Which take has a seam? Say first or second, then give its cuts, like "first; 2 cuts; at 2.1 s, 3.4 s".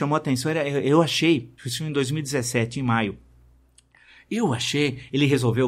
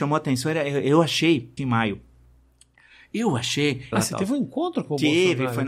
second; 2 cuts; at 1.6 s, 3.9 s